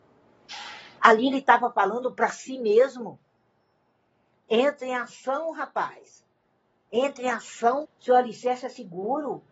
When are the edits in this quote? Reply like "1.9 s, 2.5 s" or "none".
1.0 s, 7.8 s